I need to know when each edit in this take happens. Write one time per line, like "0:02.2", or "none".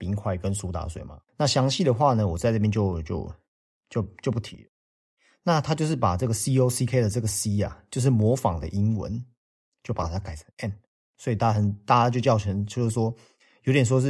0:01.3